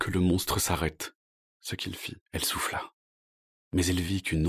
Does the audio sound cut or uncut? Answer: cut